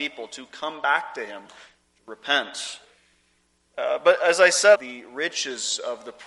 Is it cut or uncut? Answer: cut